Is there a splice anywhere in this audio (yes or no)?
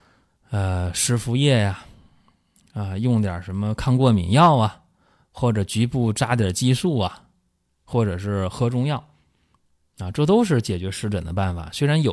no